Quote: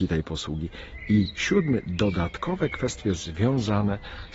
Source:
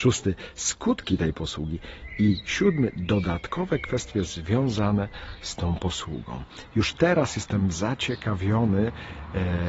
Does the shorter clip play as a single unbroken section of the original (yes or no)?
yes